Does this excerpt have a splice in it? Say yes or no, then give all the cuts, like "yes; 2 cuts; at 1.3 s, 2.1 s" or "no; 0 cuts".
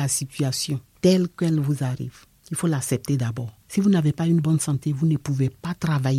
yes; 2 cuts; at 2.4 s, 3.6 s